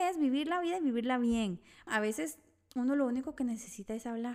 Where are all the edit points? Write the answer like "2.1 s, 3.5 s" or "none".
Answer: 1.9 s